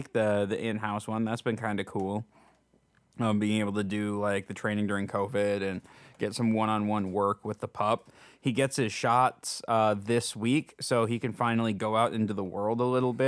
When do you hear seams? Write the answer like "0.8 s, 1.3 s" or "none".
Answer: none